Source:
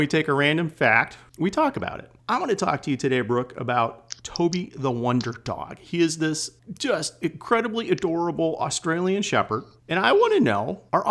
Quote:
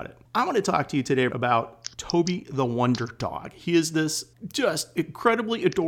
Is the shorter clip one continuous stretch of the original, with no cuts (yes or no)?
no